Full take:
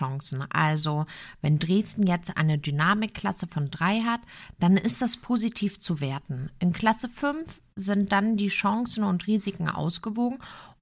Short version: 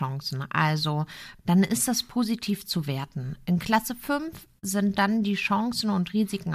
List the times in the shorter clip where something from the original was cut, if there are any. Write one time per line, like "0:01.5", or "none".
0:01.4